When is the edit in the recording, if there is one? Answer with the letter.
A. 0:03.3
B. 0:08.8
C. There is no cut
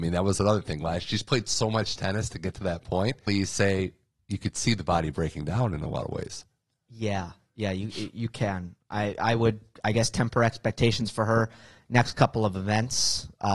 A